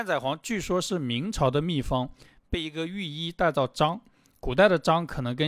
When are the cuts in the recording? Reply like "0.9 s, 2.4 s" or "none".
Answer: none